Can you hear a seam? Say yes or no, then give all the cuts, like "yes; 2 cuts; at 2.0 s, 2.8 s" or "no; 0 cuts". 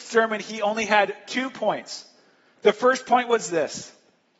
no; 0 cuts